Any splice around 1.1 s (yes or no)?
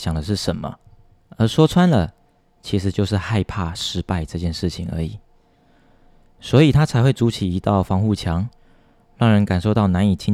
no